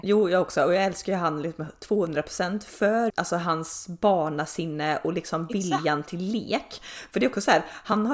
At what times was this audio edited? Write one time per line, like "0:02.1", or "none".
0:03.1